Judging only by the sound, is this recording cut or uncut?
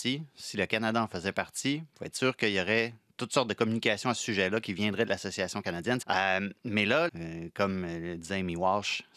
cut